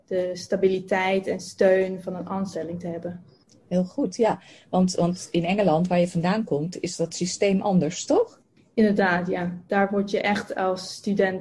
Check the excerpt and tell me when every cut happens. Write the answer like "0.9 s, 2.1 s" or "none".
none